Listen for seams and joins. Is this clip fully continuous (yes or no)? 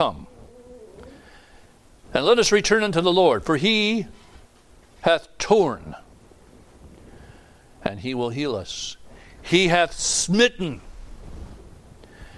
yes